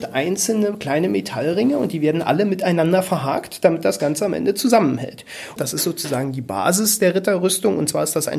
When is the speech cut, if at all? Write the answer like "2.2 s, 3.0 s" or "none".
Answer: 5.6 s